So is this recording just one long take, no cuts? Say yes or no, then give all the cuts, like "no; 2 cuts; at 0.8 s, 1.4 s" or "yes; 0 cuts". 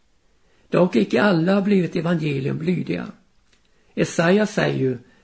yes; 0 cuts